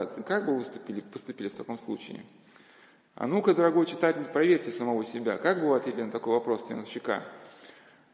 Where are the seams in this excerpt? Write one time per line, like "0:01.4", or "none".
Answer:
none